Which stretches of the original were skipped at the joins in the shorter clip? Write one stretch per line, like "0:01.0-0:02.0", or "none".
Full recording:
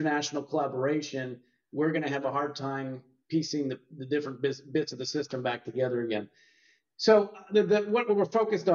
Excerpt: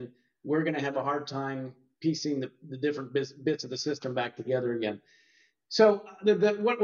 none